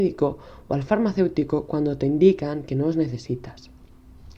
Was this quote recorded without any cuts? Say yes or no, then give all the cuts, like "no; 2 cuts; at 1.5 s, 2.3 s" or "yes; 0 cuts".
yes; 0 cuts